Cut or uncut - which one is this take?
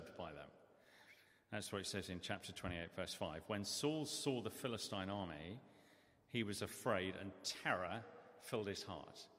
uncut